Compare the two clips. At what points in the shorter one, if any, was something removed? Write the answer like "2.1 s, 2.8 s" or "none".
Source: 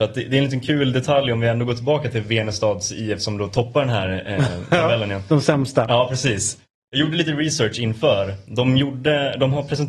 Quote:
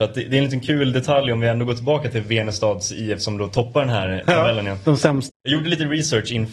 4.2 s, 5.3 s